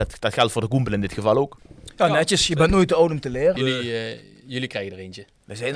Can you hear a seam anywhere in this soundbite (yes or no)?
yes